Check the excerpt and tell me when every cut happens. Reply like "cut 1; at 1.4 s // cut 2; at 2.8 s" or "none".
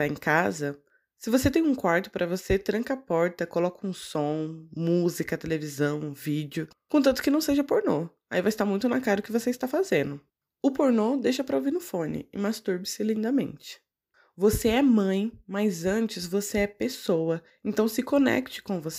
none

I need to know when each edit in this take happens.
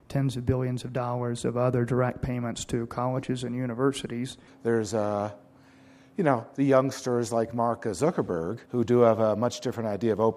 cut 1; at 4.5 s // cut 2; at 8.7 s

